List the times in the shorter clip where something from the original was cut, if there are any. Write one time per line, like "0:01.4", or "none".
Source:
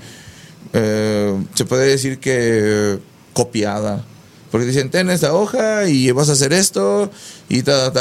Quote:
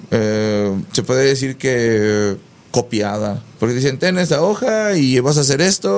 0:03.5